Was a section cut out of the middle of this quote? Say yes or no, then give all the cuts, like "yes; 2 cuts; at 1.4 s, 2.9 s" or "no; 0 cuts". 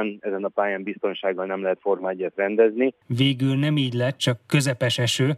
yes; 1 cut; at 3.0 s